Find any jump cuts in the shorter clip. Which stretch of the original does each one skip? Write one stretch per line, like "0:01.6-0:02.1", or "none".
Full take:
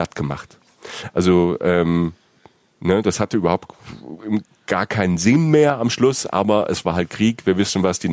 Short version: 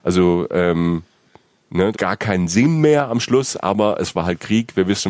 0:03.0-0:04.6